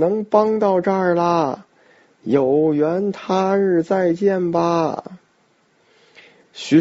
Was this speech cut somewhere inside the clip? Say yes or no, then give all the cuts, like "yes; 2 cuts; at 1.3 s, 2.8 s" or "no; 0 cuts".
no; 0 cuts